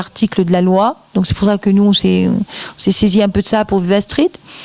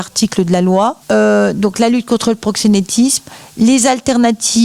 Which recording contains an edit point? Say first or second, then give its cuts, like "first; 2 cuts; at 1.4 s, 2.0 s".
second; 1 cut; at 1.0 s